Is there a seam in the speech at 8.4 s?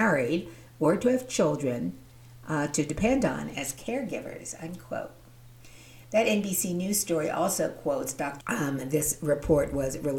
yes; 1 cut; at 8.4 s

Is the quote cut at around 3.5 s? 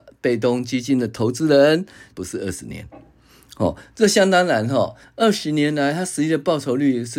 no; 2 cuts; at 2.1 s, 5.0 s

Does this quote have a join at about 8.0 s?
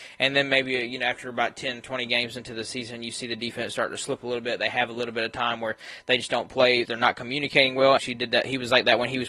yes; 2 cuts; at 6.8 s, 8.0 s

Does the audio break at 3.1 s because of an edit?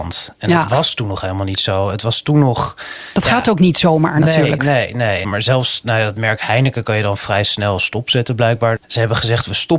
no; 2 cuts; at 5.2 s, 8.8 s

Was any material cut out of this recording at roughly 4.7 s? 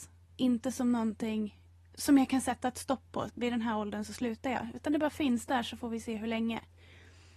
no; 1 cut; at 3.3 s

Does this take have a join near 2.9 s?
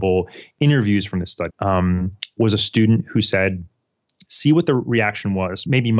no; 2 cuts; at 1.5 s, 4.3 s

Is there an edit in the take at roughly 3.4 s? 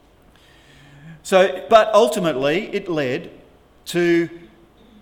no; 1 cut; at 1.7 s

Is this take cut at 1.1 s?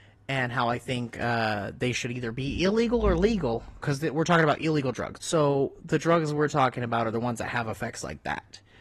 no; 2 cuts; at 3.8 s, 5.2 s

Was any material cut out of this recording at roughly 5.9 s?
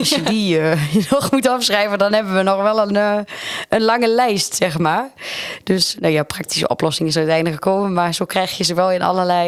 yes; 1 cut; at 5.9 s

